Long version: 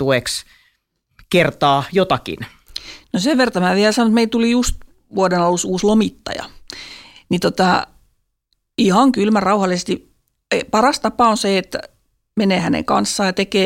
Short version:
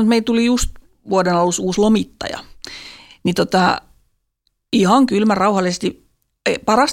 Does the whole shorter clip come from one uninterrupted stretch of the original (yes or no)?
yes